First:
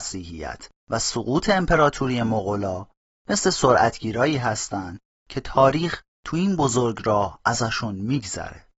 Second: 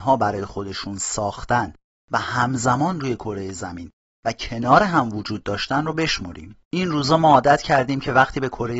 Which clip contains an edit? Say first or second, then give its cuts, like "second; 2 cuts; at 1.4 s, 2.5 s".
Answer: second; 1 cut; at 6.6 s